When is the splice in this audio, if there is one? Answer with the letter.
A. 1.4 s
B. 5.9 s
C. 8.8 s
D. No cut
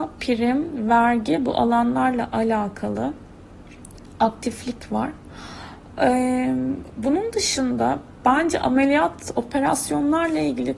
D